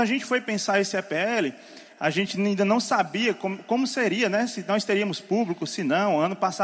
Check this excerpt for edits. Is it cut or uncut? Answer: uncut